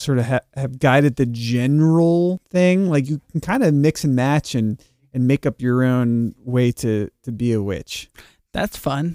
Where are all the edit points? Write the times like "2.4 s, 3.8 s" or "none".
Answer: none